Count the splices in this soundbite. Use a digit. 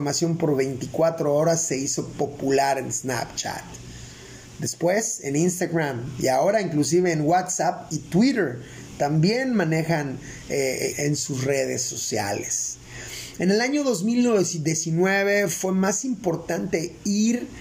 1